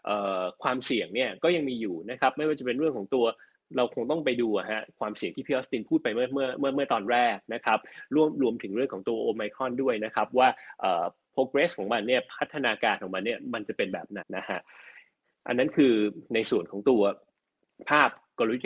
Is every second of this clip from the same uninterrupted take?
no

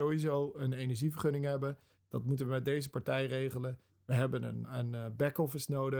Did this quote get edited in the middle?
yes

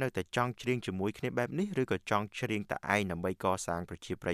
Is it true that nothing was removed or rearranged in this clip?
yes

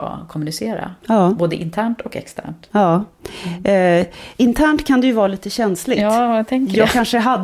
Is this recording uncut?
yes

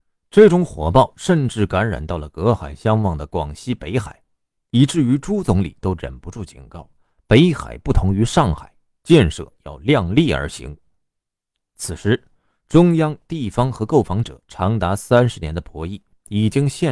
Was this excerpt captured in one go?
no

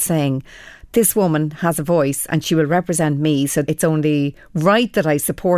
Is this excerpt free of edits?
no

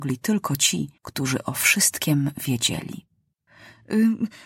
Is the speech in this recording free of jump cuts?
no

